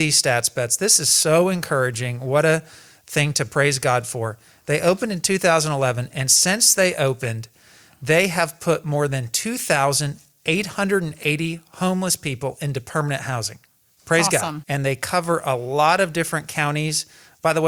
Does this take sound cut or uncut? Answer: cut